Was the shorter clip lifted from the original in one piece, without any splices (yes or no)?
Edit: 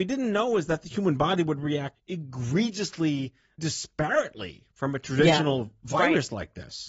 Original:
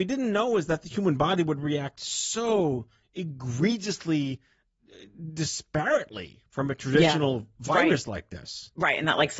no